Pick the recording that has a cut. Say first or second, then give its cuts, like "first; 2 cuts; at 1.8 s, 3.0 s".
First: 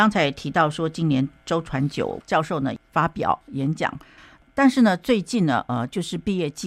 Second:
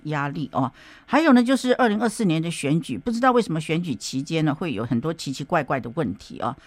first; 1 cut; at 4.2 s